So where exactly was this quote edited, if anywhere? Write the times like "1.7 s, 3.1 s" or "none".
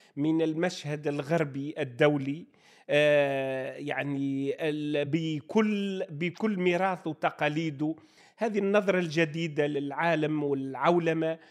none